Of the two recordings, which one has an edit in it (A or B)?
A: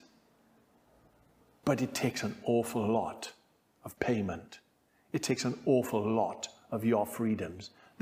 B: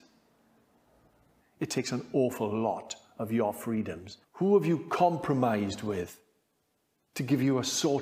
B